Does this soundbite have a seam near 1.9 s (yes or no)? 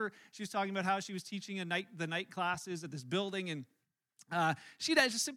no